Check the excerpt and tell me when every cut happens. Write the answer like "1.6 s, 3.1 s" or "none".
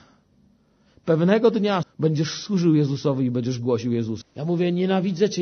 1.8 s, 4.2 s